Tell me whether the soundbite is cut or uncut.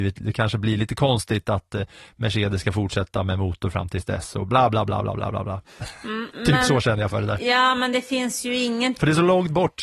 uncut